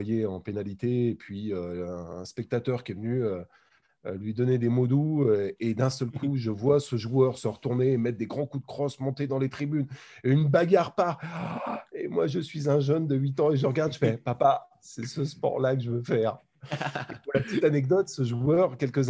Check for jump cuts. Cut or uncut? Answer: uncut